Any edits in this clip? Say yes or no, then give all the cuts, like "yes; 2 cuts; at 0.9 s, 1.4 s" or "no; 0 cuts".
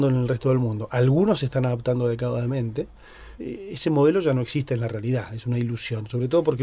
yes; 1 cut; at 3.4 s